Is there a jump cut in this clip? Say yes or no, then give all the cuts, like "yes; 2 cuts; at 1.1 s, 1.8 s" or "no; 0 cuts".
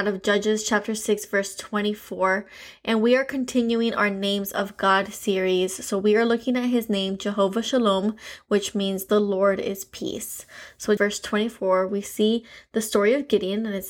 yes; 1 cut; at 11.0 s